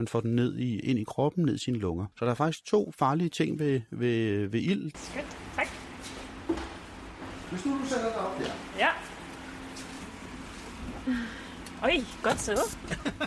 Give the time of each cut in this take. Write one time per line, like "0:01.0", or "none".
0:02.1
0:04.9